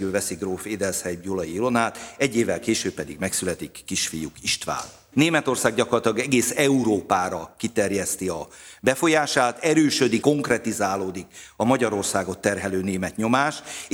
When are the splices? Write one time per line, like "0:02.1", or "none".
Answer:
0:05.1
0:10.2